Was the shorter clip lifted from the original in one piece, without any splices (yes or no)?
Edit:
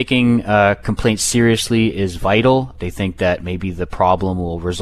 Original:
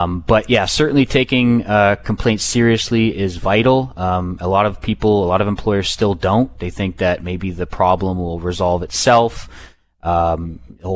no